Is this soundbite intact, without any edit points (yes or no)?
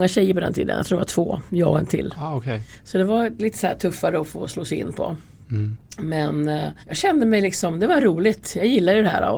no